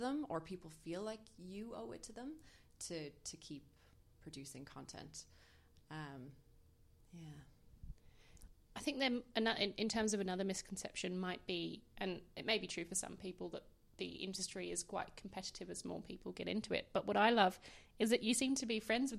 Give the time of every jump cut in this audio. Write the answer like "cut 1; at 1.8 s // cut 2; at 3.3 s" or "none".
none